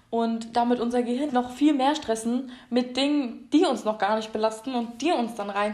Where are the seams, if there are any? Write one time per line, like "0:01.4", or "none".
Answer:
0:01.3